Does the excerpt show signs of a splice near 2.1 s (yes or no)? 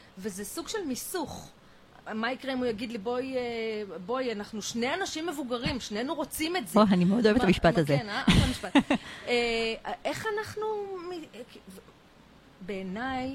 yes